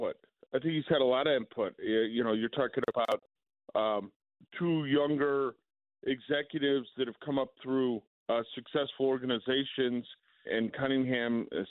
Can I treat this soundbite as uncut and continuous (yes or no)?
no